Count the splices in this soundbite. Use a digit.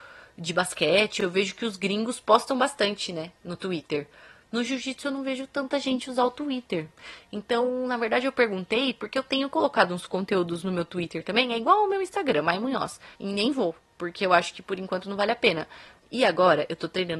2